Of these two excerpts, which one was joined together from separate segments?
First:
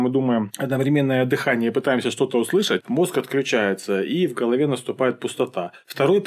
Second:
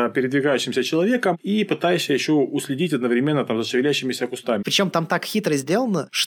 second; 1 cut; at 4.6 s

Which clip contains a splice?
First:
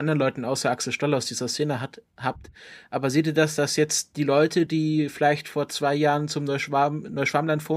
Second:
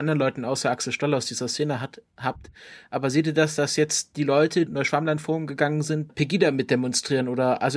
second; 2 cuts; at 4.7 s, 6.1 s

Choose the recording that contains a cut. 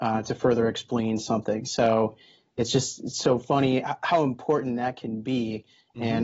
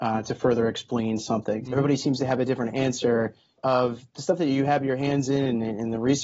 second; 1 cut; at 1.6 s

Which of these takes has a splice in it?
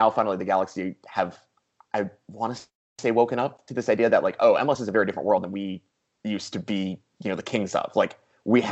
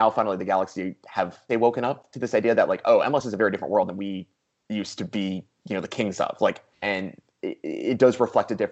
second; 2 cuts; at 1.5 s, 6.7 s

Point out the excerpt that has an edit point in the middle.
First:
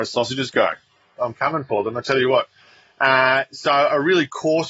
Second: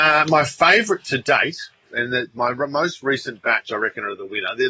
first; 1 cut; at 1.2 s

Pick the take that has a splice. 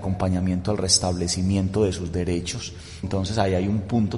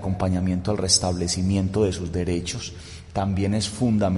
first; 1 cut; at 3.0 s

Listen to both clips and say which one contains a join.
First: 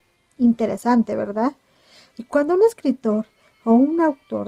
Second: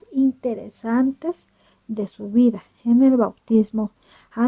first; 1 cut; at 2.1 s

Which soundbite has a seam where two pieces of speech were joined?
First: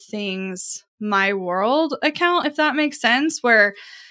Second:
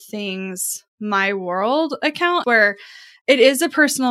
second; 1 cut; at 2.4 s

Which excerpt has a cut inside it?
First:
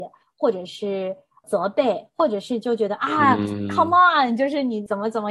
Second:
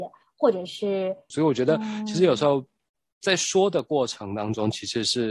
second; 1 cut; at 1.3 s

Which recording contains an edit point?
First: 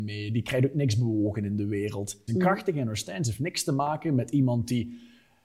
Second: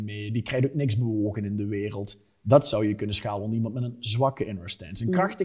first; 1 cut; at 2.3 s

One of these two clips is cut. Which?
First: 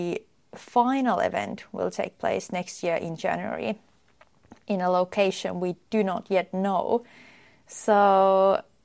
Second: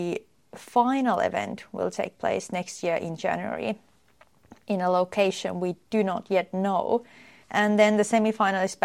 second; 1 cut; at 7.4 s

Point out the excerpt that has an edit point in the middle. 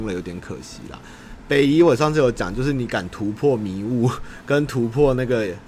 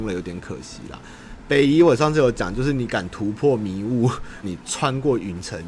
second; 1 cut; at 4.4 s

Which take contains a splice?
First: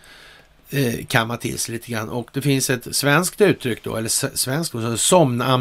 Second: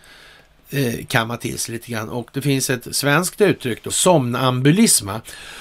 second; 1 cut; at 3.9 s

